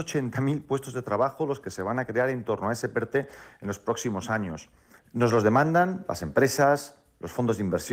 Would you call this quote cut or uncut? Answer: cut